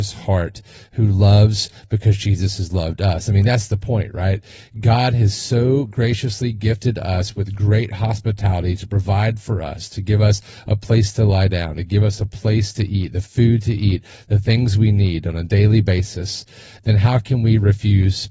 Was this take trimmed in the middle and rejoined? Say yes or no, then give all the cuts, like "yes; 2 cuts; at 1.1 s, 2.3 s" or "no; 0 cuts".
no; 0 cuts